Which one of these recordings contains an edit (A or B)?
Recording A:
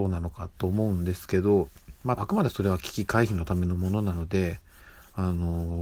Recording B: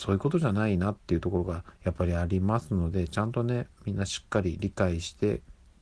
A